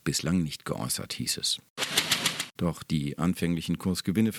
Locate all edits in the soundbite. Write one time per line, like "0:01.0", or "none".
0:02.6